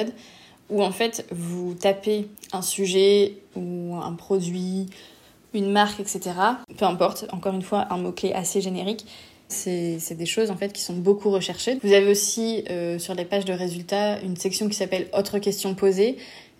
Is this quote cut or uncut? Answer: cut